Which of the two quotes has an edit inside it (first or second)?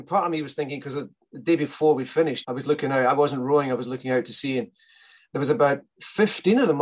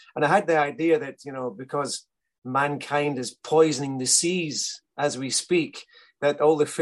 first